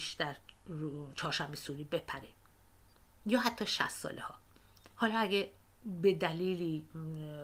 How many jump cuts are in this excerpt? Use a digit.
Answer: 1